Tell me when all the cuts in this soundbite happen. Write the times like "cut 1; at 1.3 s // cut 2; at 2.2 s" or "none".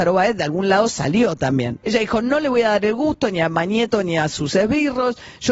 cut 1; at 1.8 s